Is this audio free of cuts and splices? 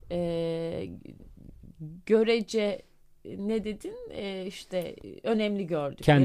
yes; 0 cuts

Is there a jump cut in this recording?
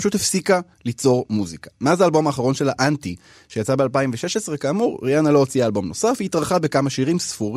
no; 0 cuts

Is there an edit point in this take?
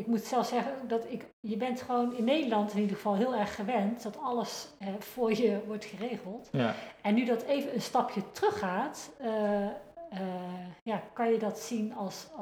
no; 0 cuts

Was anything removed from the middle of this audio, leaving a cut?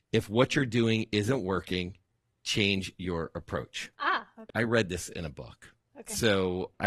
yes; 1 cut; at 4.5 s

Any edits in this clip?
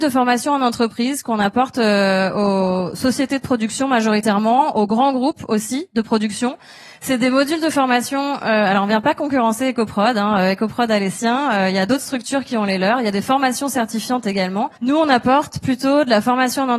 yes; 1 cut; at 14.8 s

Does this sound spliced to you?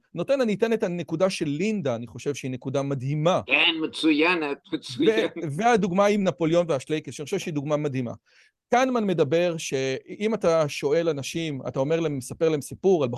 no; 0 cuts

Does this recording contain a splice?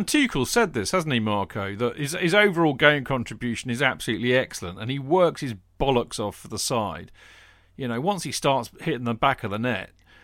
no; 0 cuts

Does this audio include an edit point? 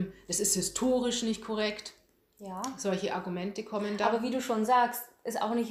no; 0 cuts

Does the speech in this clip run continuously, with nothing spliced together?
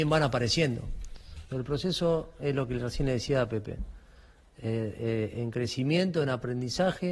no; 1 cut; at 1.5 s

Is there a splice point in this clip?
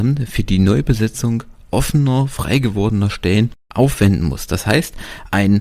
yes; 1 cut; at 3.6 s

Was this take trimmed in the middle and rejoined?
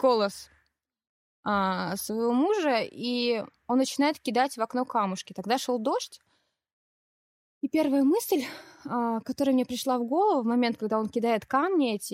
no; 0 cuts

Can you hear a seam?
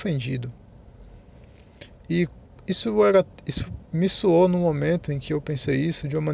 no; 0 cuts

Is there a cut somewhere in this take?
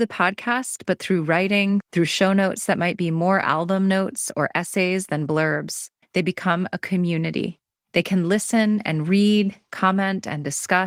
yes; 2 cuts; at 1.8 s, 6.0 s

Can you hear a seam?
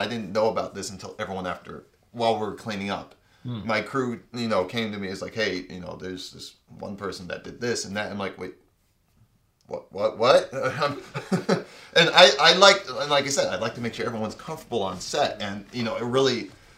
no; 0 cuts

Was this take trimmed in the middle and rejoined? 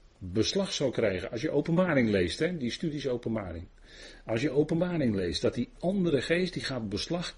no; 0 cuts

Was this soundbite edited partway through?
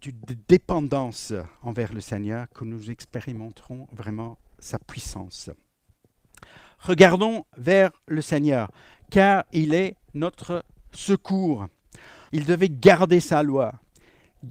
yes; 1 cut; at 12.3 s

